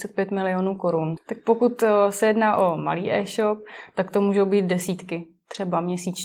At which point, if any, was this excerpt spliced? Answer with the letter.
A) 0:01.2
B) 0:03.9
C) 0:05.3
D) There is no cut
A